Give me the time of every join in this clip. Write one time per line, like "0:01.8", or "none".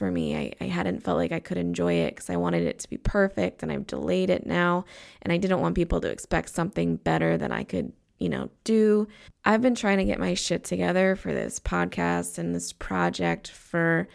0:09.3